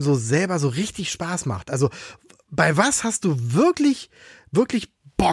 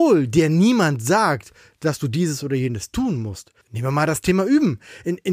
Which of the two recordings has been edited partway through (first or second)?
second